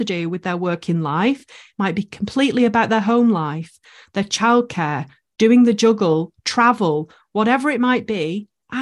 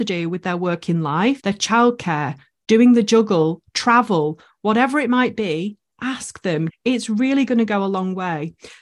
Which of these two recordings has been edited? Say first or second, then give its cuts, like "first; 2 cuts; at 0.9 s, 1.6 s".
second; 2 cuts; at 1.4 s, 6.7 s